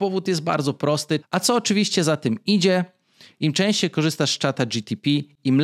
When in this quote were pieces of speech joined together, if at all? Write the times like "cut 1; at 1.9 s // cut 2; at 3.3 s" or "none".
cut 1; at 1.2 s